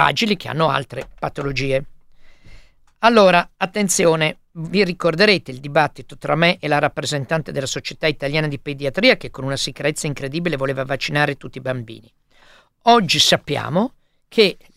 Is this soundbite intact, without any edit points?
no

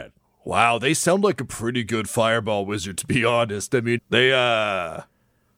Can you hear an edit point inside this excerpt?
yes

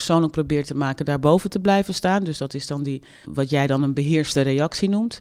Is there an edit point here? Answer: yes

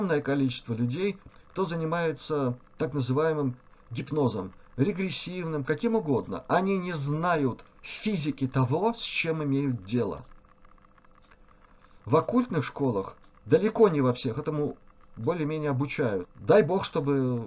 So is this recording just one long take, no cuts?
no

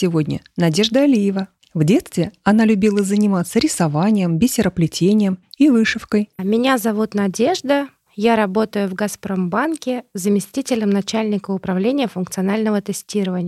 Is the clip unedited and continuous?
no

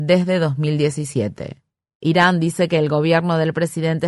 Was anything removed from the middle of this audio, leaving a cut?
no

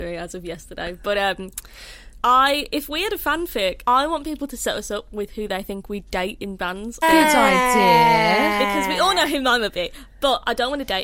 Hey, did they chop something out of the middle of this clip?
yes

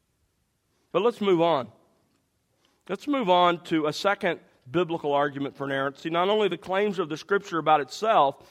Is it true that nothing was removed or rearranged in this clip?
yes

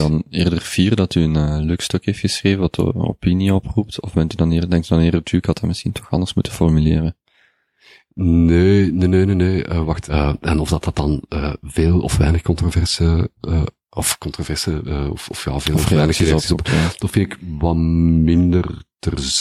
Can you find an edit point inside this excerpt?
yes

